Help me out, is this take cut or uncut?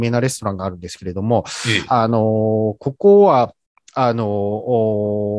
uncut